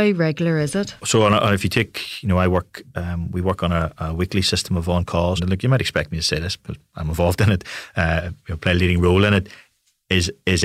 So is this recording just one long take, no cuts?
no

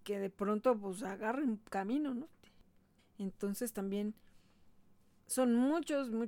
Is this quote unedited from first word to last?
no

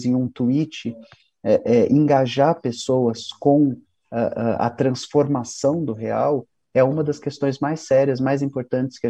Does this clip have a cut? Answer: no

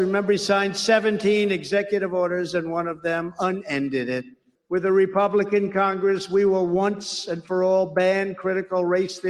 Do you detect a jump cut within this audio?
yes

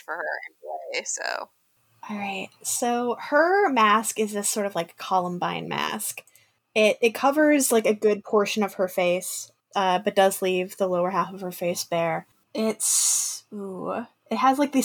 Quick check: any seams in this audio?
yes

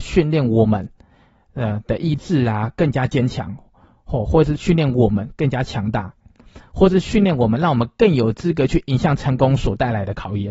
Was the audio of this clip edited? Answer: no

